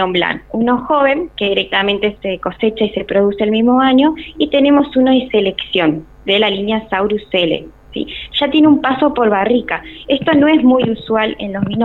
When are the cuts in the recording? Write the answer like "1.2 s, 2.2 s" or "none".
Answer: 2.2 s